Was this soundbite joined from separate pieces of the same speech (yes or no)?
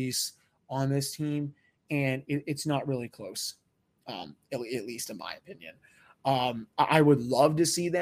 no